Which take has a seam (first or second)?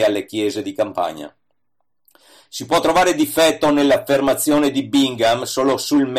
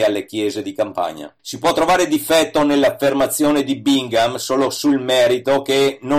second